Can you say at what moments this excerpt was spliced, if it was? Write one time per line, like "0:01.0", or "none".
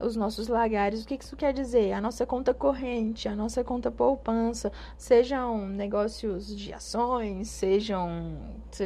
0:05.0